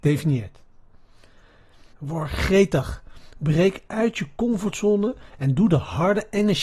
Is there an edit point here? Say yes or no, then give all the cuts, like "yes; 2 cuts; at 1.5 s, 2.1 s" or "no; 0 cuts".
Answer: yes; 1 cut; at 1.9 s